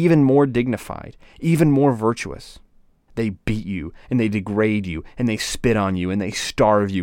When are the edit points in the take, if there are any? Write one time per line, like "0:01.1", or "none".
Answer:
0:03.1